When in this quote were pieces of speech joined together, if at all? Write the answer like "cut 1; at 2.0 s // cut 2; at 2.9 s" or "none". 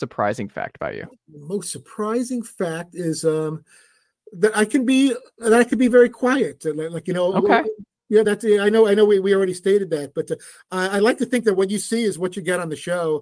none